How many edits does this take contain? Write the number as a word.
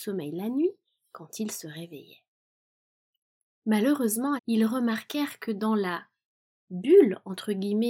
one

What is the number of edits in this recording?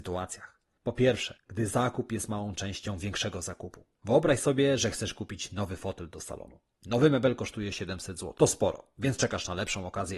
zero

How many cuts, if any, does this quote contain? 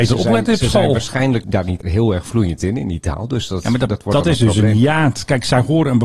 zero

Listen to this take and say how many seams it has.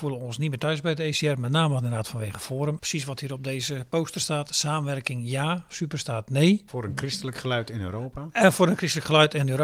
two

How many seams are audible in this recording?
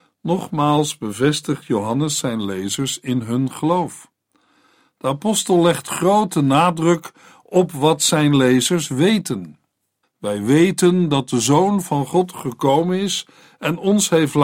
one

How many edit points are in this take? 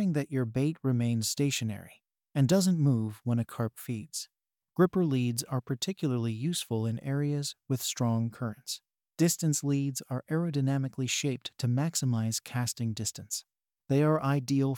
one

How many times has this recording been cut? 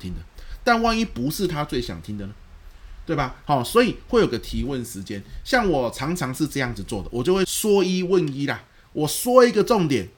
one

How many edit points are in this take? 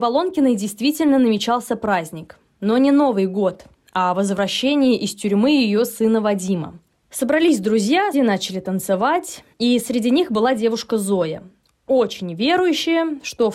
two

